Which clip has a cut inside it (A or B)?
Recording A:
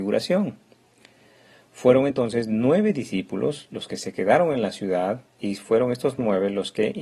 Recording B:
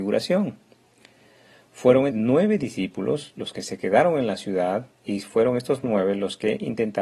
B